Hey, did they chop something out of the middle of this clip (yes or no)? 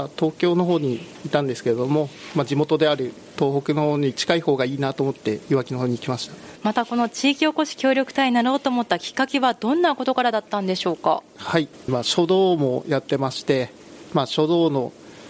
no